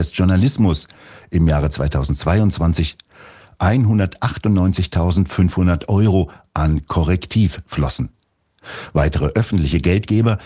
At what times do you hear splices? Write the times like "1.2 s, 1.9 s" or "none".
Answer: none

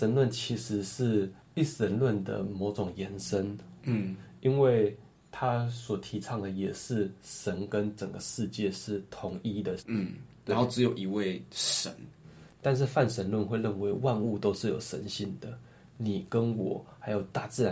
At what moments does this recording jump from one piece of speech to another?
9.8 s, 12.5 s

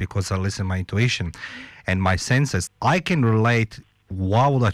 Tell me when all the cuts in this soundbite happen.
2.7 s

